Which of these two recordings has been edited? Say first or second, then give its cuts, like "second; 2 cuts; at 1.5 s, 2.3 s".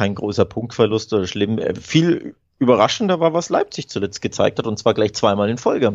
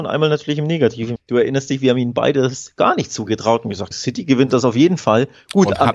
second; 2 cuts; at 1.2 s, 3.9 s